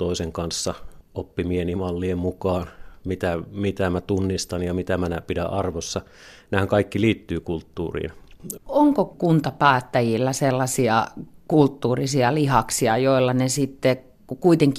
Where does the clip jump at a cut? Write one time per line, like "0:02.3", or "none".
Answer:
0:08.6